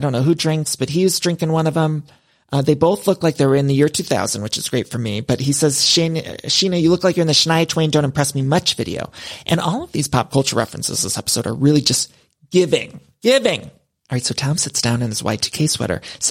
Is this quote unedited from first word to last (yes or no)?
yes